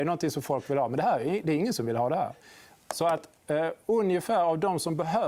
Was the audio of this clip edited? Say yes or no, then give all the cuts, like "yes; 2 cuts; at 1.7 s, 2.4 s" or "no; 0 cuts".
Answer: no; 0 cuts